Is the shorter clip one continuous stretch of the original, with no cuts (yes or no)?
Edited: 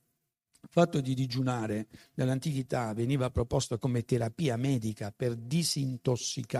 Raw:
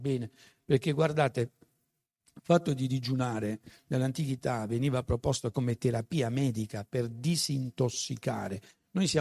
yes